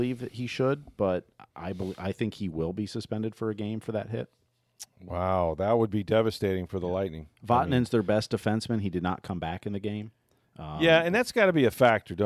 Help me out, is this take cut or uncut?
uncut